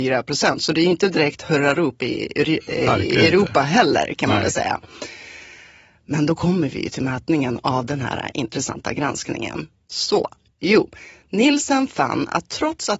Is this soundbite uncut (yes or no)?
yes